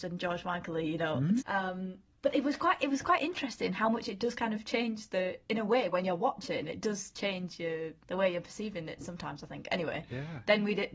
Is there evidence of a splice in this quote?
yes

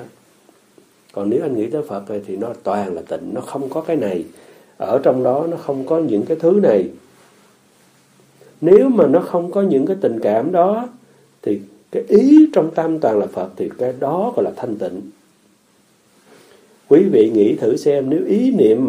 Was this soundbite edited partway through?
no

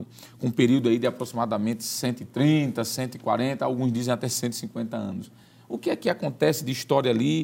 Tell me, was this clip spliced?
no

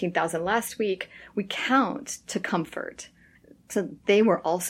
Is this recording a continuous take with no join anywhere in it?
yes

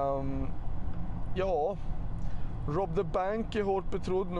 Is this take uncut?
no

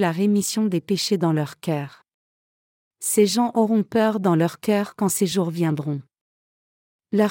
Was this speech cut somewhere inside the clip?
no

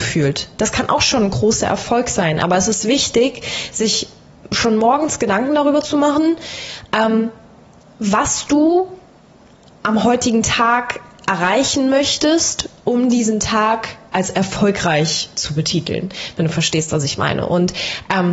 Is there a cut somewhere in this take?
no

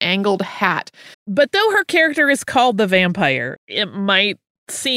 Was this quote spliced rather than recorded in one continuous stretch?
yes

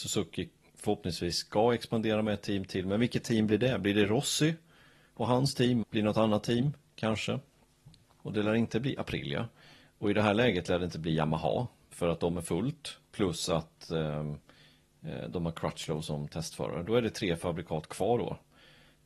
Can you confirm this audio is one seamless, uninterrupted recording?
no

